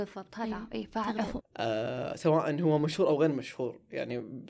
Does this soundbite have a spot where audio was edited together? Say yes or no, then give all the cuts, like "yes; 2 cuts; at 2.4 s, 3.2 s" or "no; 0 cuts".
yes; 1 cut; at 1.4 s